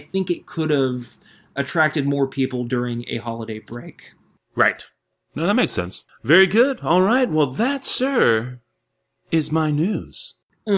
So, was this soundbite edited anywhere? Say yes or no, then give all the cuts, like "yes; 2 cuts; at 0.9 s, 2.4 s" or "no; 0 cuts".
yes; 1 cut; at 6.1 s